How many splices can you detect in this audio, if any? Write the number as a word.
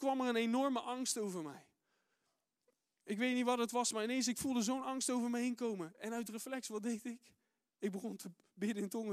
zero